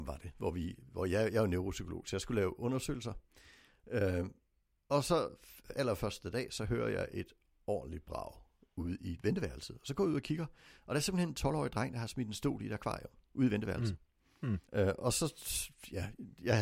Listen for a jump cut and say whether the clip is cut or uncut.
cut